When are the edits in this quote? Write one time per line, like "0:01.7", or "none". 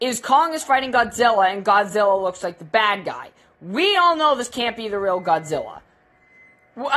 none

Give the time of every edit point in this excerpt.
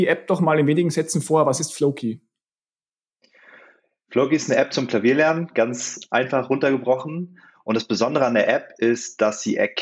none

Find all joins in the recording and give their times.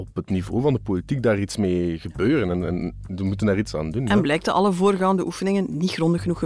none

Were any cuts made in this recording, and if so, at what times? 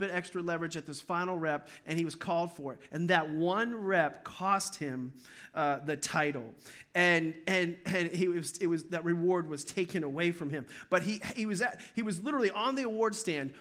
none

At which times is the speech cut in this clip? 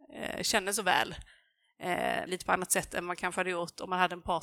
0:02.3

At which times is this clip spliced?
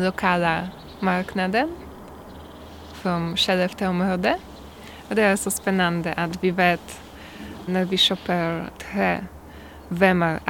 0:07.7
0:08.8

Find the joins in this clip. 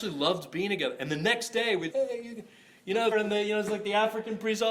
0:01.9
0:03.1

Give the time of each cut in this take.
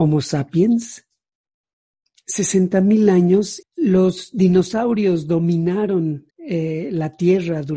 0:03.6
0:06.3

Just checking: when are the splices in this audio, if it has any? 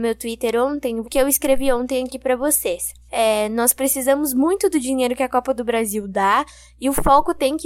0:01.0
0:03.1

